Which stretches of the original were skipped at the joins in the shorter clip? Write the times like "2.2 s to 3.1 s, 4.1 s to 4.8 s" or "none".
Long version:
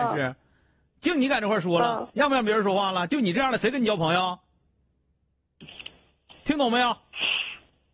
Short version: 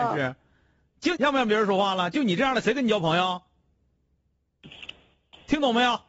1.1 s to 2.1 s